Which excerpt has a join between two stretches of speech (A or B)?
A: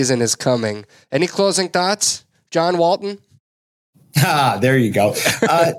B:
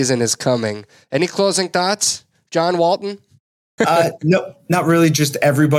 B